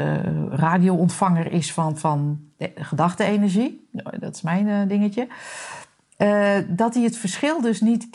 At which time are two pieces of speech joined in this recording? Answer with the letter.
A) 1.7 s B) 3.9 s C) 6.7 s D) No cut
D